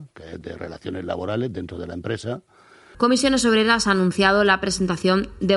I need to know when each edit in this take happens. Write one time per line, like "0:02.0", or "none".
0:02.9